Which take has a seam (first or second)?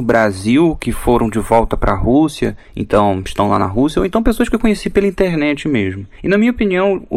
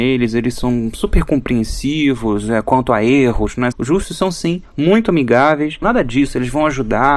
second